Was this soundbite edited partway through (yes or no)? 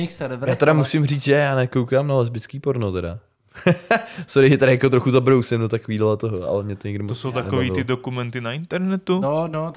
no